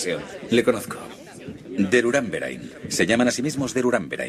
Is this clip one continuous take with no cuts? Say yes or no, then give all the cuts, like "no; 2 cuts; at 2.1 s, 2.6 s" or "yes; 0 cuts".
yes; 0 cuts